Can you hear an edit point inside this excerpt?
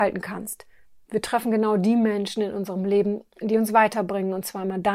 yes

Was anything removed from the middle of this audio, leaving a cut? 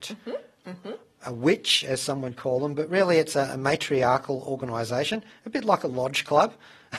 no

